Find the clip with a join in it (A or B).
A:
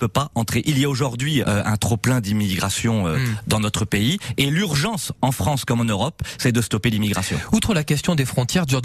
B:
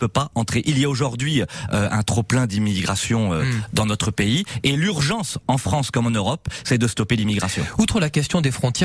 A